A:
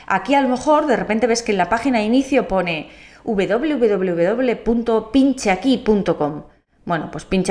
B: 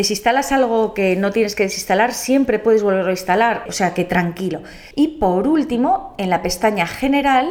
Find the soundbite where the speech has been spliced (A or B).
B